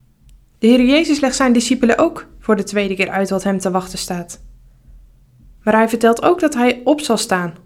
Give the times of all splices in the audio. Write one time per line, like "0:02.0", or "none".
0:05.6